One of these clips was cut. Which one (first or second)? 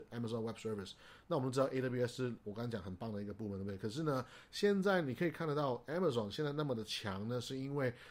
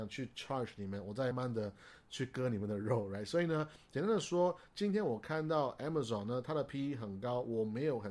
second